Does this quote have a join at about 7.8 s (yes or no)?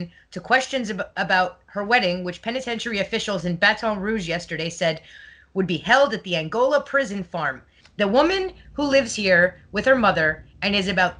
yes